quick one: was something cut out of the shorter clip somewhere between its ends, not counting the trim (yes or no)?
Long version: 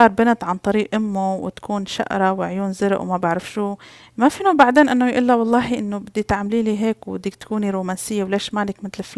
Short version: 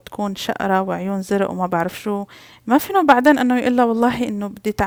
no